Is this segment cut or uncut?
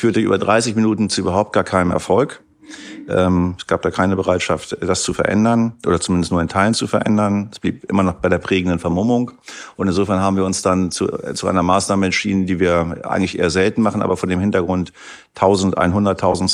uncut